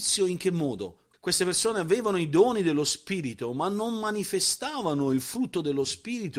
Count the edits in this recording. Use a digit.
1